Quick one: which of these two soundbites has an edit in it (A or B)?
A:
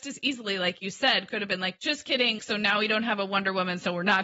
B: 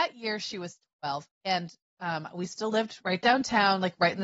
A